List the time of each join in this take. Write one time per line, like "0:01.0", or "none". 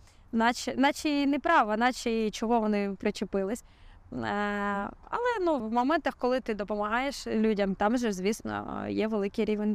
0:05.6